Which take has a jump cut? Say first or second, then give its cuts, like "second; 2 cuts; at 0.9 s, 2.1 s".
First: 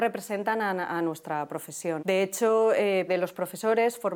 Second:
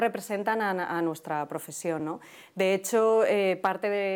first; 2 cuts; at 2.0 s, 3.1 s